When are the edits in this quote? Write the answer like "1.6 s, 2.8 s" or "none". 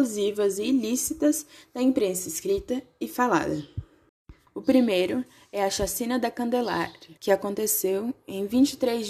4.5 s, 7.2 s